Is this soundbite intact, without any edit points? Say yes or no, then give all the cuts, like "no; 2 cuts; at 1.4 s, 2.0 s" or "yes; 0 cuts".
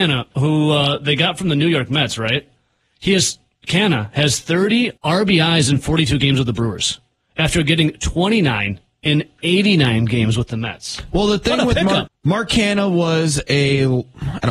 no; 2 cuts; at 5.0 s, 12.1 s